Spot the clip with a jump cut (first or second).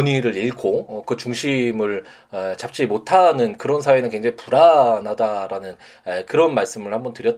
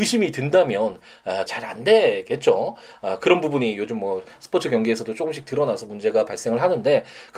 second